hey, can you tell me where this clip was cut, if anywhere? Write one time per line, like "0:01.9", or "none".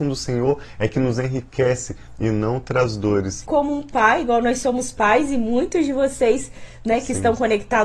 0:03.4